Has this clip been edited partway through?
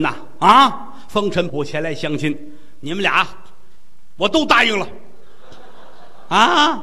yes; 1 cut; at 1.5 s

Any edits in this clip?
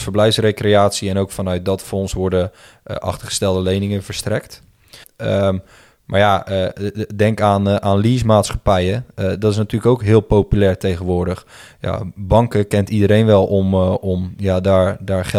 yes; 1 cut; at 5.0 s

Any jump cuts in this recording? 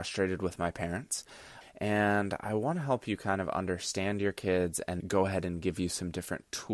yes; 2 cuts; at 1.6 s, 5.0 s

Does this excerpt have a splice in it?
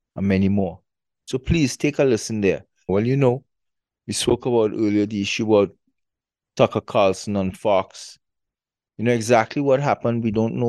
yes; 1 cut; at 2.9 s

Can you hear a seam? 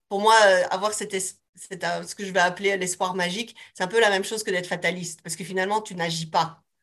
no; 0 cuts

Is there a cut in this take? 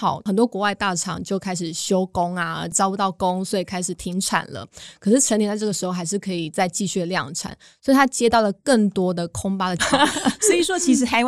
yes; 1 cut; at 9.8 s

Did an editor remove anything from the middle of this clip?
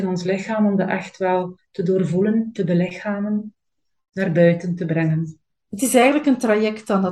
no; 0 cuts

